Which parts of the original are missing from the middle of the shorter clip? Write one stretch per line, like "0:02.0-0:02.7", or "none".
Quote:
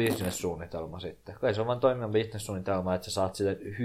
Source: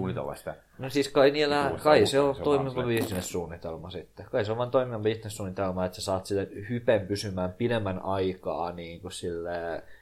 none